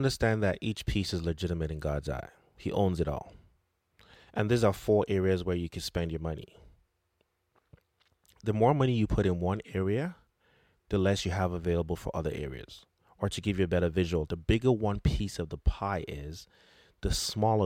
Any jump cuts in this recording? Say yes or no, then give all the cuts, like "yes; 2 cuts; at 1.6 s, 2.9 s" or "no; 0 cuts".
no; 0 cuts